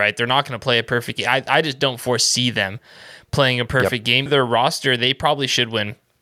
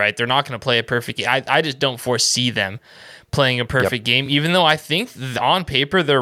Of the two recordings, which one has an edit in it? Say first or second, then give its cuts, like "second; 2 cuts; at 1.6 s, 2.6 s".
first; 1 cut; at 4.3 s